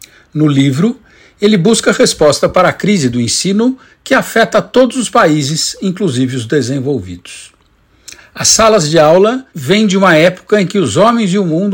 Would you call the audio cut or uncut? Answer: cut